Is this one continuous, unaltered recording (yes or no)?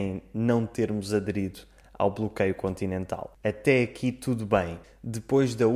no